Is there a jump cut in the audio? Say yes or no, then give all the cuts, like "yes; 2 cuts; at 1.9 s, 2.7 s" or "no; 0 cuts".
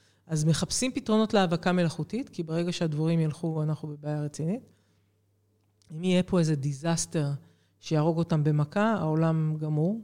no; 0 cuts